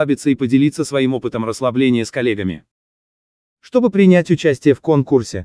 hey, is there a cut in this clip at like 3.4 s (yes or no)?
no